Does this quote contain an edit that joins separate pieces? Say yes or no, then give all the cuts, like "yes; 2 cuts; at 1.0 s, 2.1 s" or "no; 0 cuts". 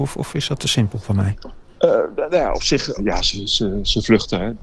yes; 1 cut; at 3.0 s